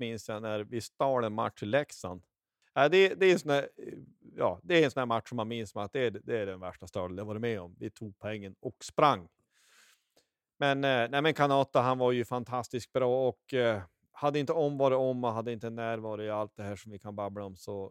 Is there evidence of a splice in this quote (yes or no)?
yes